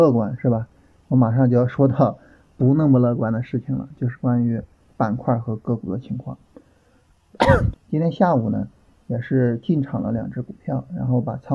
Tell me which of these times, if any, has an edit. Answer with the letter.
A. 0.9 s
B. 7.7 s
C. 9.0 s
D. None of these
B